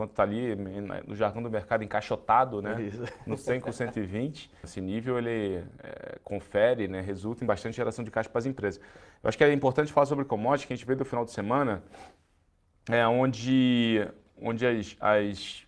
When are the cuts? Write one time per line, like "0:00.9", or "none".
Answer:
0:04.6